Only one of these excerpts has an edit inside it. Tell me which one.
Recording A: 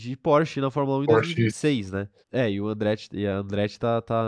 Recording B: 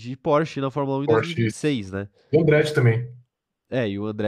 A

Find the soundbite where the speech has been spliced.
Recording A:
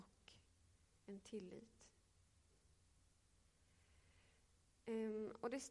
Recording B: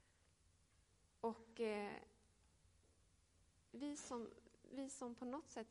B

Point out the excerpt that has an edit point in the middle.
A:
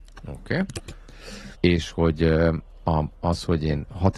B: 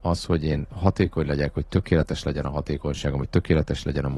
A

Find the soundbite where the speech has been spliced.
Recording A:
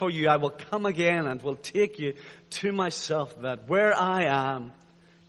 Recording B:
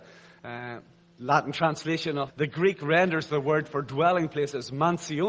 B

